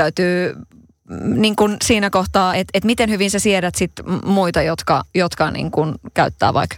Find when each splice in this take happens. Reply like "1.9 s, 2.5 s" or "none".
none